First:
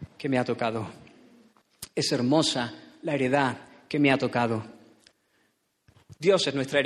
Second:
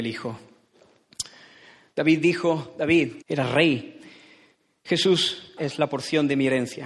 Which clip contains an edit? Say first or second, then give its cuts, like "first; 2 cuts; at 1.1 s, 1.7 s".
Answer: second; 2 cuts; at 3.2 s, 5.6 s